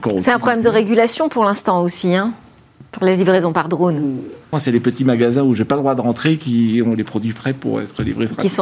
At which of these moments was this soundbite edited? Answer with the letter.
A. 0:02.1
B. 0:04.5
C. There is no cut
B